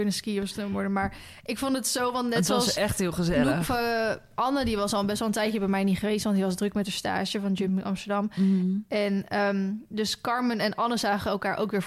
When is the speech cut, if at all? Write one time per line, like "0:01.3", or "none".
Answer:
none